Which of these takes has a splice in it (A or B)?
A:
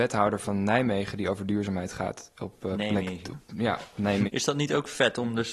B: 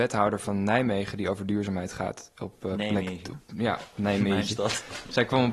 A